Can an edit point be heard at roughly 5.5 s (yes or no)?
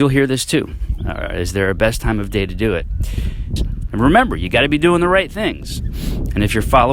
no